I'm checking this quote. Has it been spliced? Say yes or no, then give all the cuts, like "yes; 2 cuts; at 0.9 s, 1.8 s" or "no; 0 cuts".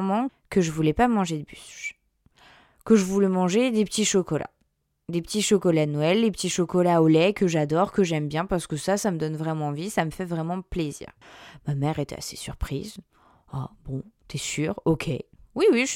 no; 0 cuts